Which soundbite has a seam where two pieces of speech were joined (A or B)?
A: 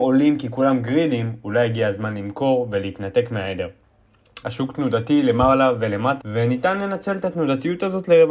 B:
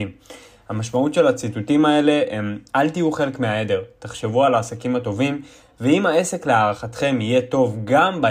A